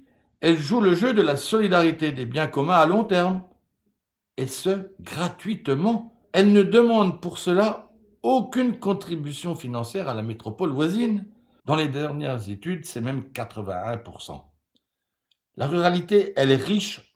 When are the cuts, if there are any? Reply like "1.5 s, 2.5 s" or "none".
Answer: 6.2 s, 11.6 s